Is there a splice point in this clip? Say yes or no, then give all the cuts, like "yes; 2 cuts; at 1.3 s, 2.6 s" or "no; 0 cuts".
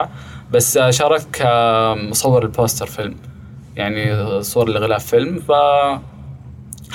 no; 0 cuts